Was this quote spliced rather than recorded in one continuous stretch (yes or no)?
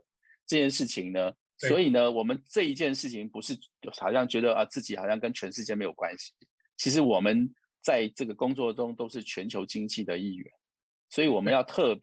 yes